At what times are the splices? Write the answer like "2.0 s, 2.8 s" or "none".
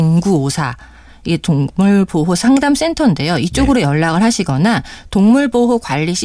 none

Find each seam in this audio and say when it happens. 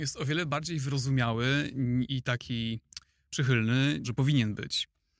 2.1 s, 4.0 s

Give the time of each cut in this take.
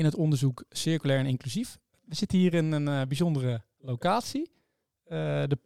none

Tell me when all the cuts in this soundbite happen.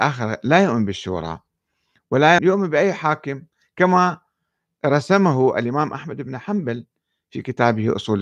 2.4 s

